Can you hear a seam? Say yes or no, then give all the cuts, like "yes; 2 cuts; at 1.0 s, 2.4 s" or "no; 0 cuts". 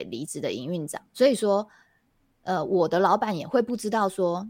yes; 1 cut; at 1.1 s